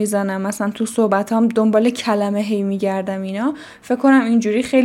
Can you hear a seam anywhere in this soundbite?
no; 0 cuts

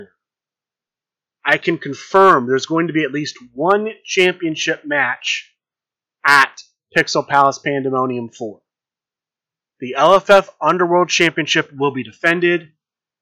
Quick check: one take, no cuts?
no; 1 cut; at 1.2 s

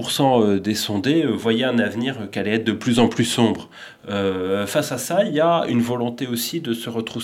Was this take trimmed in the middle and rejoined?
no; 0 cuts

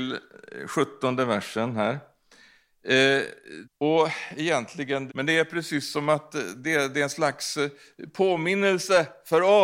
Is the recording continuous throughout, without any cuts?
no; 2 cuts; at 3.6 s, 5.1 s

